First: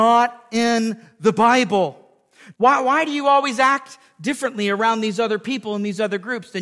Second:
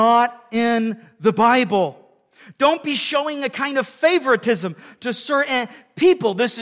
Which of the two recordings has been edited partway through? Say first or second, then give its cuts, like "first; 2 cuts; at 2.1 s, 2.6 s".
first; 1 cut; at 2.5 s